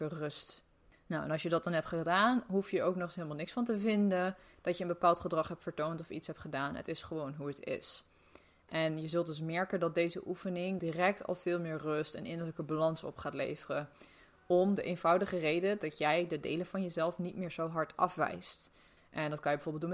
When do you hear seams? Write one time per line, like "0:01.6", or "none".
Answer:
0:10.8
0:19.0

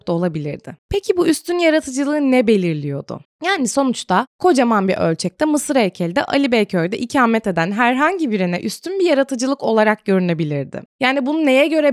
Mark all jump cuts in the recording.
none

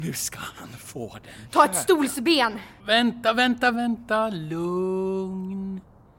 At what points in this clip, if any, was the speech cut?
0:03.7

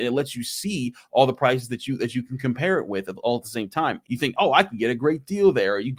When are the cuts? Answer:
0:04.0

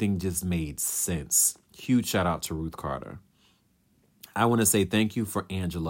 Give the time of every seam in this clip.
none

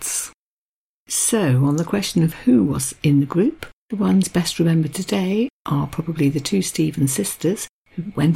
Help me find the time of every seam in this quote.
none

